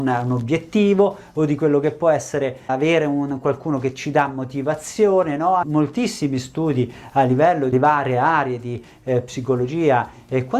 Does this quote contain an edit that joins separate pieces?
yes; 1 cut; at 5.6 s

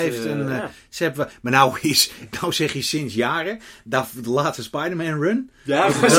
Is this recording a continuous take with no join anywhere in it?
yes; 0 cuts

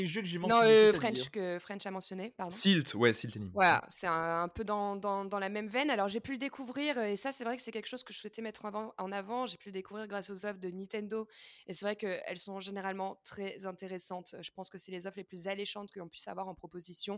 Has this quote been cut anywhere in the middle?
no; 0 cuts

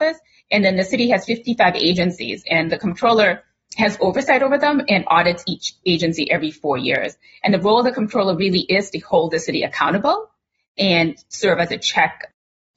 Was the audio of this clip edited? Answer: no; 0 cuts

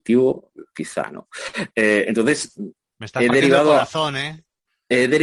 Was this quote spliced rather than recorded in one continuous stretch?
no; 0 cuts

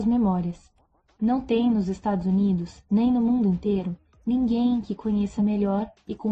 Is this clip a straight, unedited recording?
yes; 0 cuts

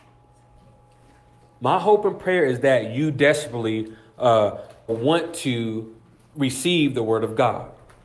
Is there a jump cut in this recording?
yes; 2 cuts; at 1.6 s, 4.9 s

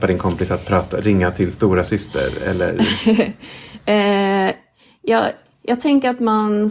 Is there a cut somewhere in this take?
no; 0 cuts

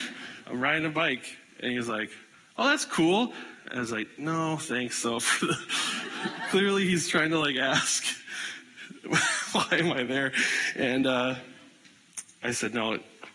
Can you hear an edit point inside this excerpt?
yes; 1 cut; at 3.6 s

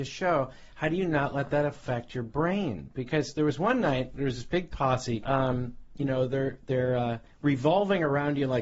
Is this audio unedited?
no; 1 cut; at 5.2 s

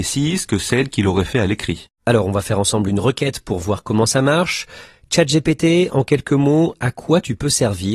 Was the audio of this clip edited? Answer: no; 0 cuts

